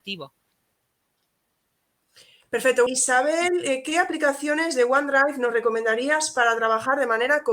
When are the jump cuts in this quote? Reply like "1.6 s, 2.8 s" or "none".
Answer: 2.9 s